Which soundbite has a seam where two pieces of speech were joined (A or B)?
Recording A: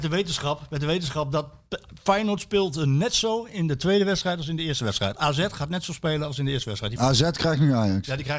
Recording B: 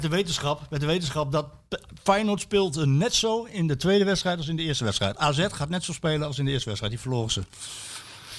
A